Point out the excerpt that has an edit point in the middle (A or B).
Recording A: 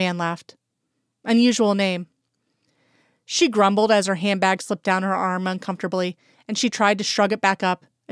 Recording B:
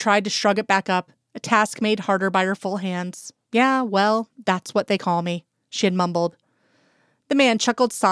B